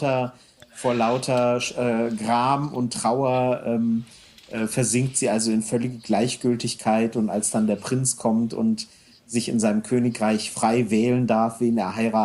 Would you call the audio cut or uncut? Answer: uncut